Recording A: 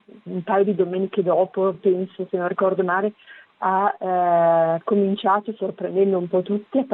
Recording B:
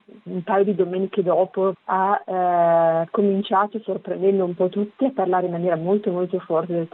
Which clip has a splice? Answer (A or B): B